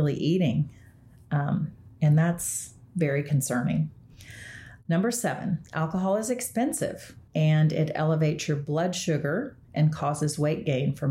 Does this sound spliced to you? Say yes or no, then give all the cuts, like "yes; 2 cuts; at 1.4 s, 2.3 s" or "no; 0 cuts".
yes; 2 cuts; at 4.8 s, 7.3 s